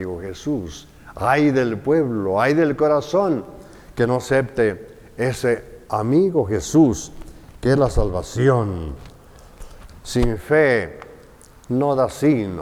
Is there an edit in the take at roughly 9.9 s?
yes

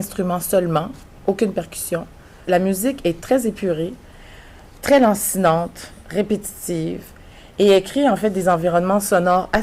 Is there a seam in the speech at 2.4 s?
yes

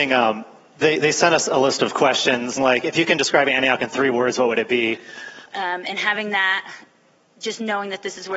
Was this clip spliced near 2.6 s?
yes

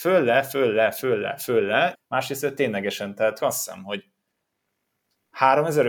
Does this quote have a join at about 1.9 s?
yes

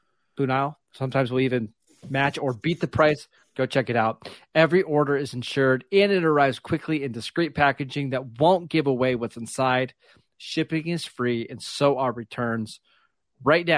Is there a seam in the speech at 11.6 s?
no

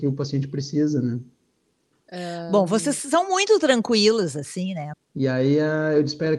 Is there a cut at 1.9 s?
no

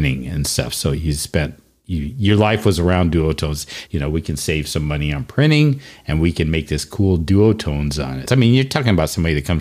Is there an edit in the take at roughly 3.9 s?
yes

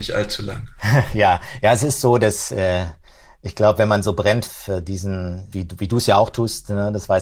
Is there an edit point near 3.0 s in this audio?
no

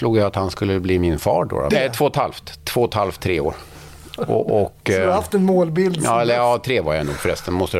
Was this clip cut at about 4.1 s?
no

